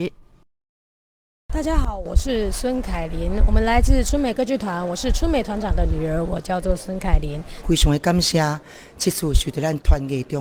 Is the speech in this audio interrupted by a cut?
yes; 1 cut; at 7.6 s

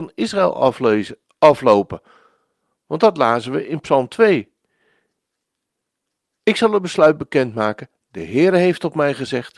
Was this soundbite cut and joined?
no; 0 cuts

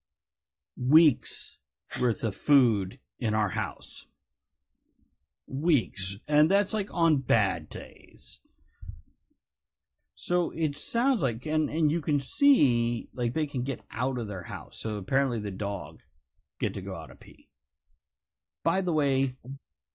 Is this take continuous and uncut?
no; 2 cuts; at 10.0 s, 18.6 s

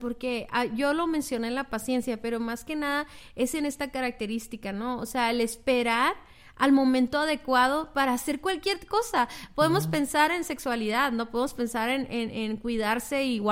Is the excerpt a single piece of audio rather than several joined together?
yes; 0 cuts

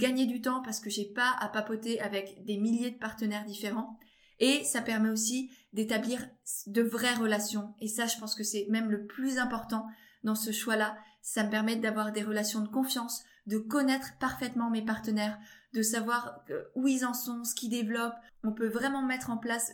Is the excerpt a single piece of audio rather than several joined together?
yes; 0 cuts

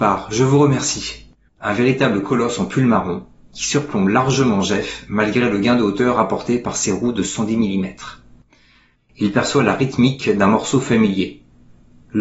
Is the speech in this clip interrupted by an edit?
yes; 2 cuts; at 1.5 s, 9.0 s

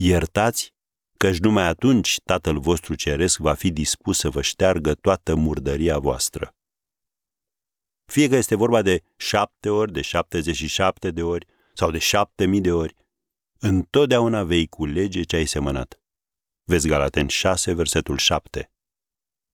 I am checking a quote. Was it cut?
no; 0 cuts

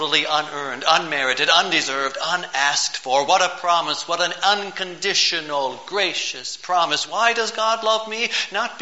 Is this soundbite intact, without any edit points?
yes; 0 cuts

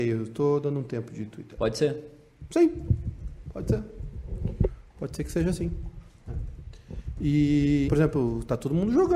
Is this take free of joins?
no; 2 cuts; at 1.6 s, 7.9 s

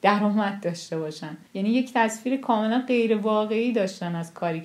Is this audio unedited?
no; 1 cut; at 1.5 s

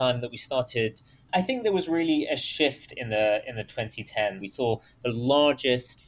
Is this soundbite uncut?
no; 2 cuts; at 1.3 s, 4.4 s

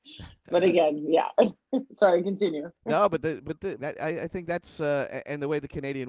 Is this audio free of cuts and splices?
no; 1 cut; at 3.8 s

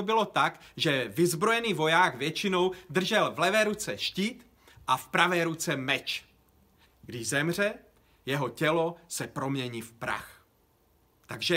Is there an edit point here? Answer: yes; 1 cut; at 6.8 s

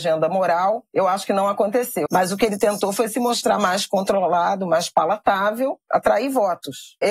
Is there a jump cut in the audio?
yes; 2 cuts; at 2.1 s, 5.9 s

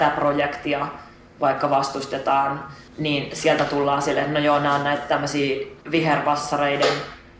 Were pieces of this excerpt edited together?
yes; 2 cuts; at 2.9 s, 5.8 s

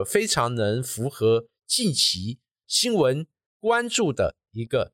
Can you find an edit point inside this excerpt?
no; 0 cuts

